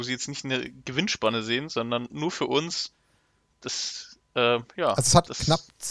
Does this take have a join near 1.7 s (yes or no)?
no